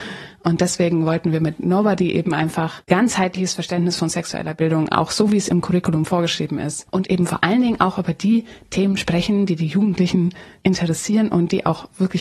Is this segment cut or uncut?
cut